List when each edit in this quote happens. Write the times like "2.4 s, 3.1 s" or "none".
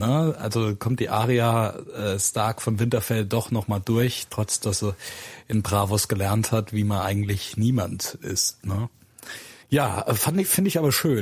9.6 s